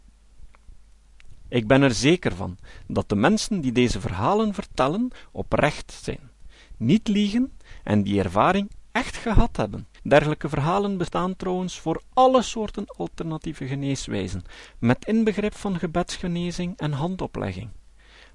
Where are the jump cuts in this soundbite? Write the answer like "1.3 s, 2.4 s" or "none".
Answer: 1.4 s, 9.9 s